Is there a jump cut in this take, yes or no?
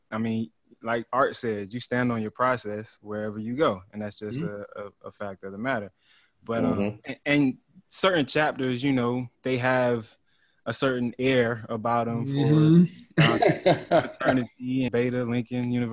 yes